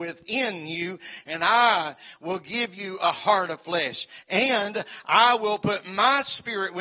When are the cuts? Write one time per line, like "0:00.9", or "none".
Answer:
0:01.2